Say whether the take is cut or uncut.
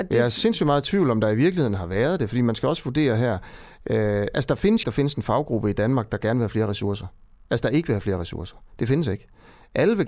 cut